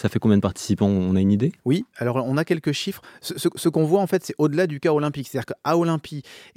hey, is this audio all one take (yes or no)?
no